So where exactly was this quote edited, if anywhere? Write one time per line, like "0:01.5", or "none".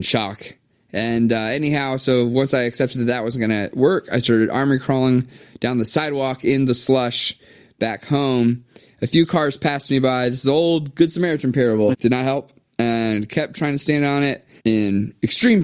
0:11.9
0:14.6